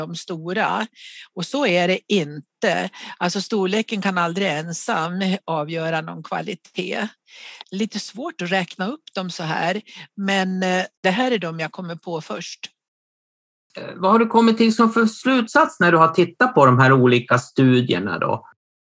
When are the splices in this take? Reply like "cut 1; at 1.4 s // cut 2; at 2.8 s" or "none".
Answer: cut 1; at 7.6 s